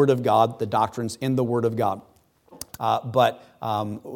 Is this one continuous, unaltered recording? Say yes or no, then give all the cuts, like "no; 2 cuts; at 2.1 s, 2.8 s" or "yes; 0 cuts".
no; 1 cut; at 2.7 s